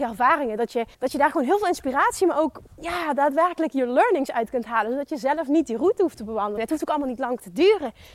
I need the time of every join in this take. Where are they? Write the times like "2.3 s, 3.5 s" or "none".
0.9 s, 6.6 s